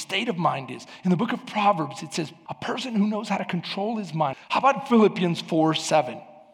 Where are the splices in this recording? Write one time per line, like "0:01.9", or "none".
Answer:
0:02.5
0:04.3